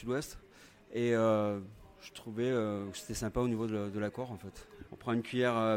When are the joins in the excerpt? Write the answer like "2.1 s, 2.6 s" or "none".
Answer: 4.9 s